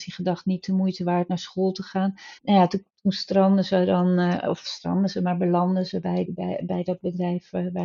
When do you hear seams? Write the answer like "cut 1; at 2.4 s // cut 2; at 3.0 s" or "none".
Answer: cut 1; at 2.4 s // cut 2; at 6.3 s